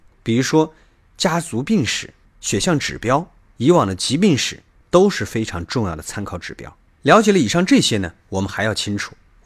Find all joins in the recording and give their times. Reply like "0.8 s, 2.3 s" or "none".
none